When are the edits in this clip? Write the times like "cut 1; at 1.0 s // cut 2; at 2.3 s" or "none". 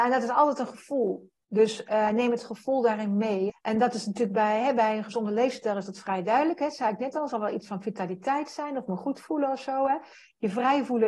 cut 1; at 3.5 s